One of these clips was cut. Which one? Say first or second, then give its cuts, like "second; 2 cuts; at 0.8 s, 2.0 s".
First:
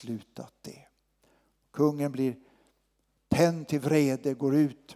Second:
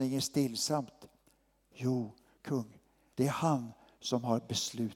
second; 1 cut; at 3.1 s